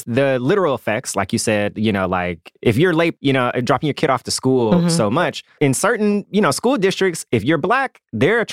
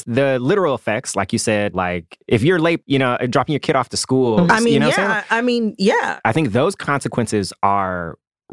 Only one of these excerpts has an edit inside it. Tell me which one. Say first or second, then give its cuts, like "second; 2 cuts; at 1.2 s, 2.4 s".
second; 2 cuts; at 1.7 s, 4.5 s